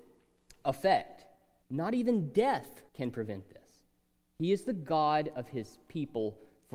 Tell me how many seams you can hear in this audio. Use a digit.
2